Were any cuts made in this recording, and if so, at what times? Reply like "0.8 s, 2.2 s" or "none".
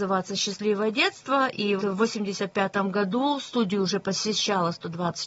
1.8 s

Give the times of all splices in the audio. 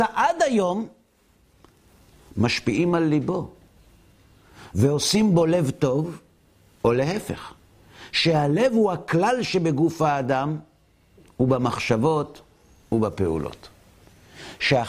none

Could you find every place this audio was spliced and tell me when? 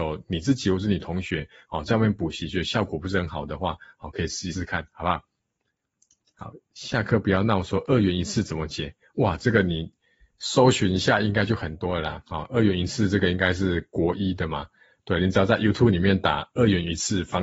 4.5 s

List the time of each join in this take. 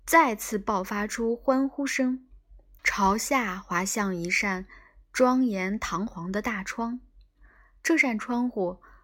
2.8 s

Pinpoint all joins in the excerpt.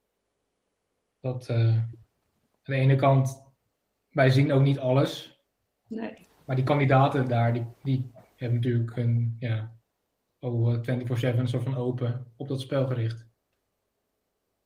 none

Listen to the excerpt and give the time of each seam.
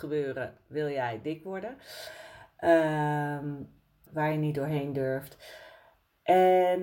4.1 s

